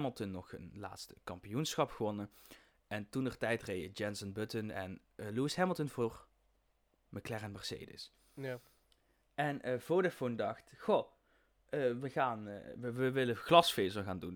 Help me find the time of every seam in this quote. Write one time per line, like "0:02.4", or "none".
none